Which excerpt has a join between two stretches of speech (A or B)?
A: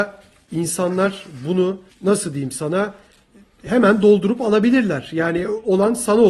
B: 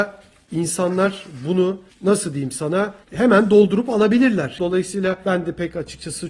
B